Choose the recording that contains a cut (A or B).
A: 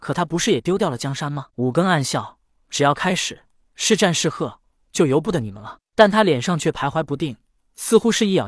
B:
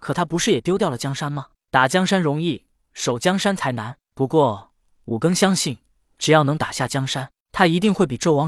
A